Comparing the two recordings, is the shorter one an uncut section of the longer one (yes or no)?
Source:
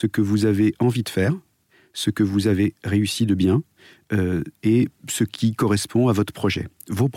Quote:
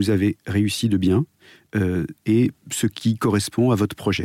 yes